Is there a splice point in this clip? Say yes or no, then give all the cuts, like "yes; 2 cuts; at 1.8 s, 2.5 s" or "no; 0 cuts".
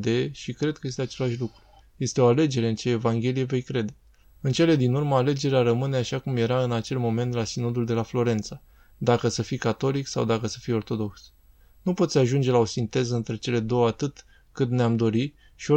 yes; 2 cuts; at 1.8 s, 4.2 s